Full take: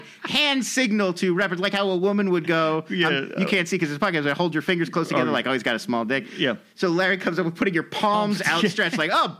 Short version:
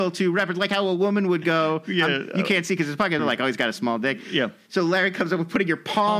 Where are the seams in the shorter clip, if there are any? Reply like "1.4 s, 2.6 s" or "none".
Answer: 3.2 s